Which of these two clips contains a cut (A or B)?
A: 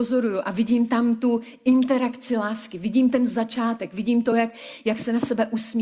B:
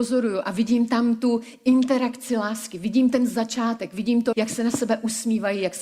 B